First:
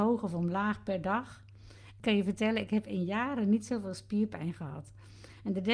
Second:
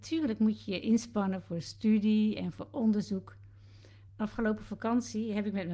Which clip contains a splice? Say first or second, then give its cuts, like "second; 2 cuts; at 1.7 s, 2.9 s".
second; 1 cut; at 4.1 s